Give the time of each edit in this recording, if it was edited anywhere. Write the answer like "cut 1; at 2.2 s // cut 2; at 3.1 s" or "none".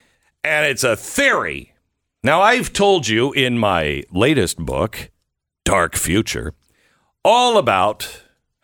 none